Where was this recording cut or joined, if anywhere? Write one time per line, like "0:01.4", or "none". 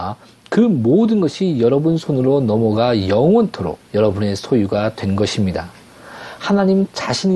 0:03.8